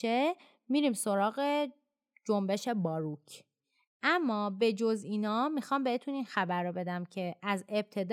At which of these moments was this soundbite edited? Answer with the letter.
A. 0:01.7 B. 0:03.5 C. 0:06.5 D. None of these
D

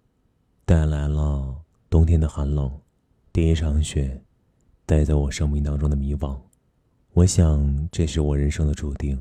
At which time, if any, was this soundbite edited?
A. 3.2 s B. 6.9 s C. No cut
A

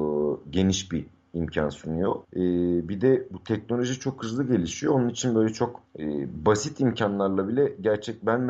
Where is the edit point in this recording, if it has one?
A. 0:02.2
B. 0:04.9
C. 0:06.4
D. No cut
A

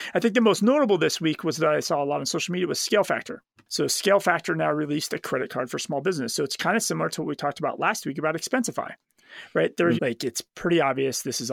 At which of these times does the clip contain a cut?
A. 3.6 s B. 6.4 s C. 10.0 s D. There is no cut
C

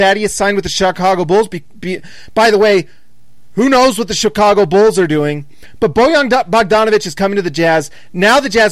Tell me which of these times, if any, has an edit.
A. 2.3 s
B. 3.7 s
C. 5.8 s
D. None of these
D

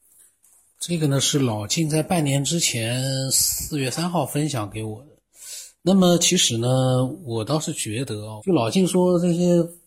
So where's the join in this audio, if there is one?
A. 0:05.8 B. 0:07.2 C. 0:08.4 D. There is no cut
C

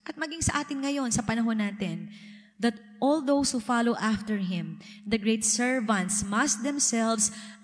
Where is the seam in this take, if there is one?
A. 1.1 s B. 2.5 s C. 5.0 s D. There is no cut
D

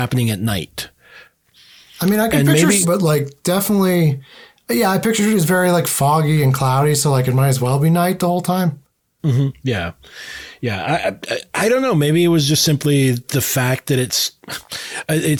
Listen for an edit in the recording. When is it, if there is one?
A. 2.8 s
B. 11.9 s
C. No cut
A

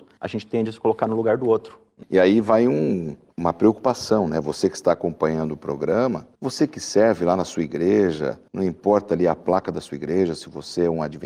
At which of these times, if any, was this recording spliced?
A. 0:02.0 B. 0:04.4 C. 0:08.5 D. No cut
A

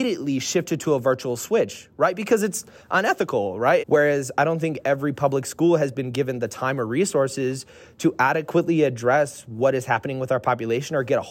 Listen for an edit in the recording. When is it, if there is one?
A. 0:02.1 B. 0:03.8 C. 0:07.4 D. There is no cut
B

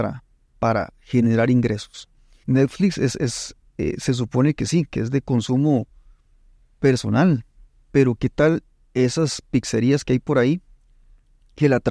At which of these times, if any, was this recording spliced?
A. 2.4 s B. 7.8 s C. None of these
A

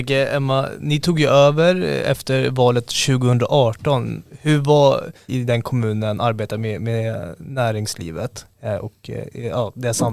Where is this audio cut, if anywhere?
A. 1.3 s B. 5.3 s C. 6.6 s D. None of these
B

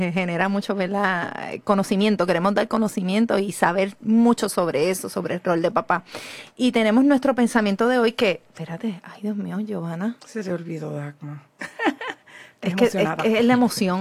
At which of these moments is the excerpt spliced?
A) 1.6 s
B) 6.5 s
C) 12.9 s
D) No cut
D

